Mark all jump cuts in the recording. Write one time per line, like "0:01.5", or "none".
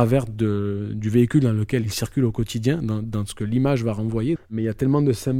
0:04.4